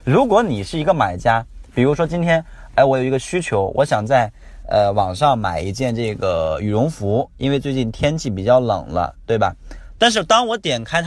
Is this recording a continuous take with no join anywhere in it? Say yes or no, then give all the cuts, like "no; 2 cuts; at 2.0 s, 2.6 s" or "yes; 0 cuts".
no; 1 cut; at 10.0 s